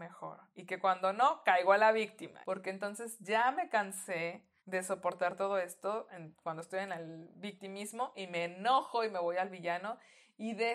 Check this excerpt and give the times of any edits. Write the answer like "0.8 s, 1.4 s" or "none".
2.4 s, 4.6 s